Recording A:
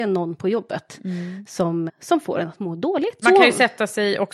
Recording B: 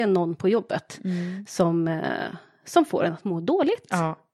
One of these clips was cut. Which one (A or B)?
A